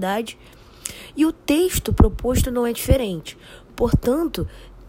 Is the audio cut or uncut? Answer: uncut